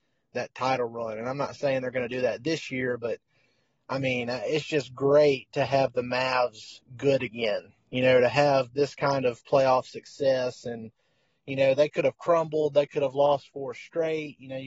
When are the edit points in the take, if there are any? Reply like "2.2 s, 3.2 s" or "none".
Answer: none